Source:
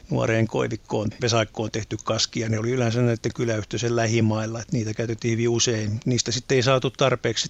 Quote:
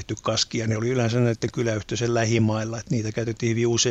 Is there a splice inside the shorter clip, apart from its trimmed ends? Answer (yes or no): no